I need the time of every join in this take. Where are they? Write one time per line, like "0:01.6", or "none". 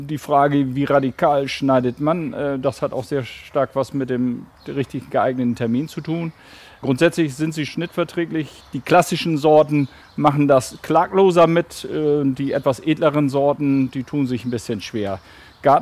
0:07.7

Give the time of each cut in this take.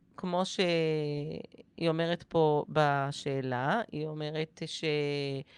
none

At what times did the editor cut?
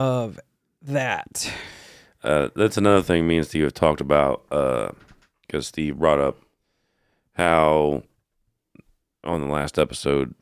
none

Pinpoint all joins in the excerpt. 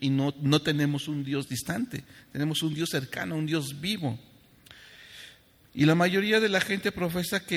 none

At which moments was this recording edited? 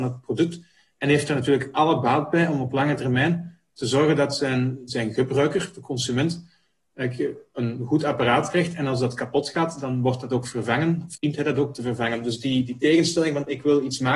none

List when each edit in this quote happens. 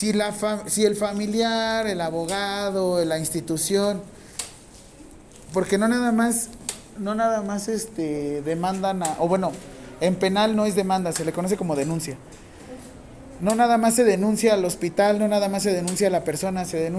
none

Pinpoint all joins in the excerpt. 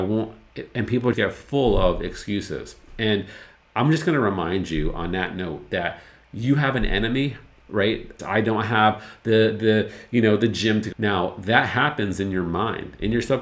0:01.1
0:08.2
0:10.9

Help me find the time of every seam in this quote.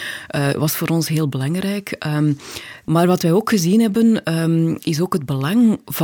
none

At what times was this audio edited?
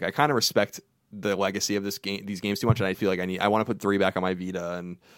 0:02.9

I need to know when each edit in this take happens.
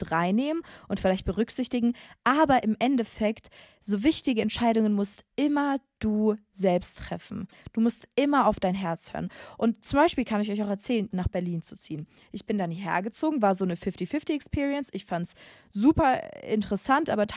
0:11.1

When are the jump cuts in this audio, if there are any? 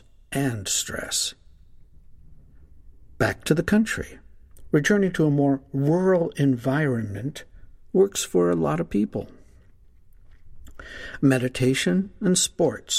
none

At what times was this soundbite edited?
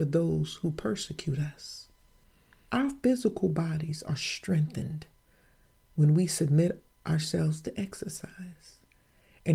0:02.7

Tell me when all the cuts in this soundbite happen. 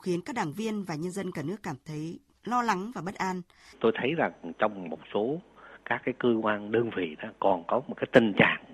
0:03.7

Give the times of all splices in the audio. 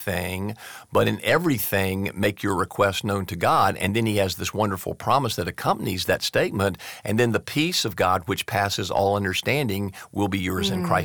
none

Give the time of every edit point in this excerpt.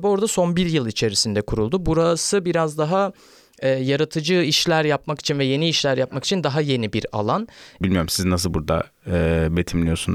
0:07.8

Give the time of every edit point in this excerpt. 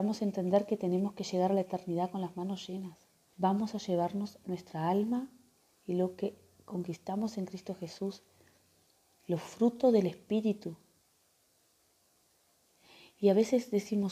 0:03.3

